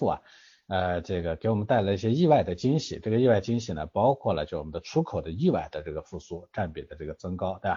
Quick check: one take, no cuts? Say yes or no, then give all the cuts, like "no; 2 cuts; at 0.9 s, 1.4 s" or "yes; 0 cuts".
yes; 0 cuts